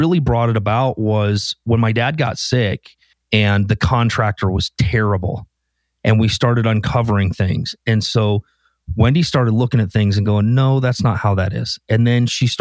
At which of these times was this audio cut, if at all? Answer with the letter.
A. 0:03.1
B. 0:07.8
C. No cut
A